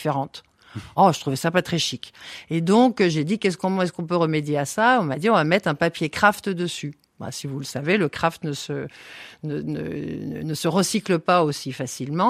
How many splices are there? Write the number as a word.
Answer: zero